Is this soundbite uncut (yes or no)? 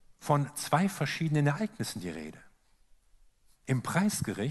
yes